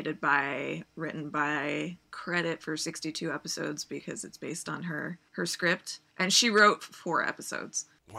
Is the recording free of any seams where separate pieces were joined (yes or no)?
yes